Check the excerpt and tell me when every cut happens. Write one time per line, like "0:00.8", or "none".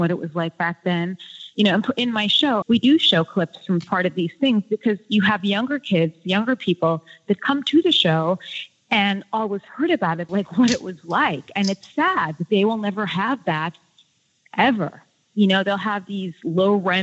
0:02.6
0:10.3